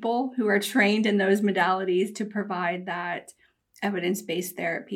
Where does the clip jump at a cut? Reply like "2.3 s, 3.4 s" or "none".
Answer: none